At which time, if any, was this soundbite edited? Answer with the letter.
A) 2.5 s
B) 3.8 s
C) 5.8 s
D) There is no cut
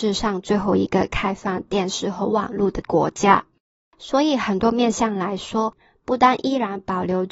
D